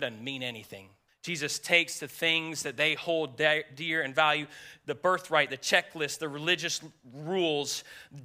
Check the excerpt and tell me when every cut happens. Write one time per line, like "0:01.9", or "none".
0:01.1